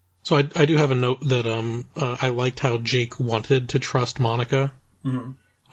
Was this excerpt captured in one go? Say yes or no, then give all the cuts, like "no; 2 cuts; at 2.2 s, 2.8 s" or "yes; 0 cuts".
yes; 0 cuts